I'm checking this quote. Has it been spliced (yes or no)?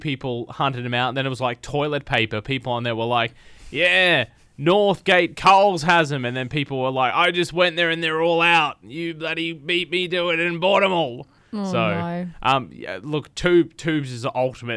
no